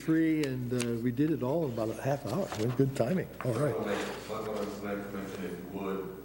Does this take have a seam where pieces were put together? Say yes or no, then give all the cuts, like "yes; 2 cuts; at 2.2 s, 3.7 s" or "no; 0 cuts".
no; 0 cuts